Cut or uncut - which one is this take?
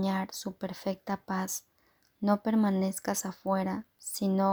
uncut